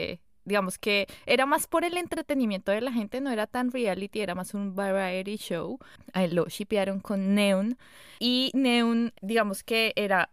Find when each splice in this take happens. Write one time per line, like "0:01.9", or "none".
0:06.0